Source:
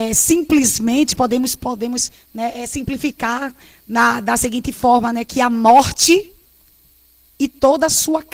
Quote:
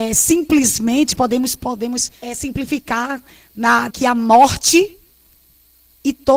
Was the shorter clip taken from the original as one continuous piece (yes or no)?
no